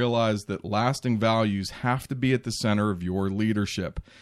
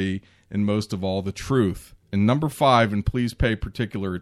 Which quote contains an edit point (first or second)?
second